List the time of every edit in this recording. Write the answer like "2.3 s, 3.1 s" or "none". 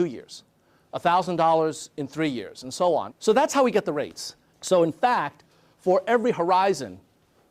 3.1 s, 4.5 s